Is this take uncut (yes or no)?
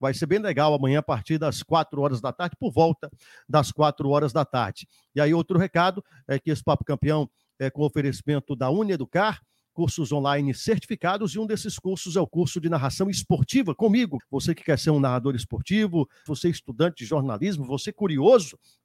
no